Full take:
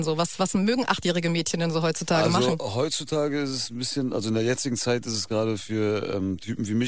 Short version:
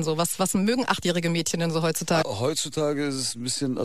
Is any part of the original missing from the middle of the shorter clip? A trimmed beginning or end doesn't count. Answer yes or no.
yes